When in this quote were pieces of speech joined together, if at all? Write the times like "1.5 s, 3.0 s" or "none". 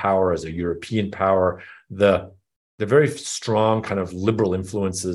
none